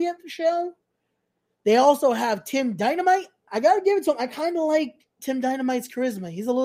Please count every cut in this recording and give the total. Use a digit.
1